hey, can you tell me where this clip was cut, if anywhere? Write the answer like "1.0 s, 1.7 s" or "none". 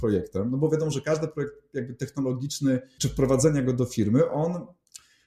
3.0 s